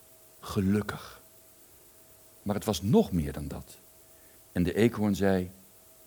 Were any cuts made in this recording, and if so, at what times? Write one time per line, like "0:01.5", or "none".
0:04.3